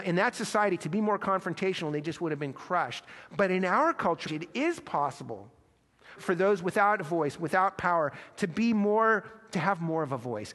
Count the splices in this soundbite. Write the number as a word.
two